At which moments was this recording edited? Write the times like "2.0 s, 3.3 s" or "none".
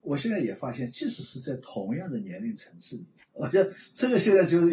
3.2 s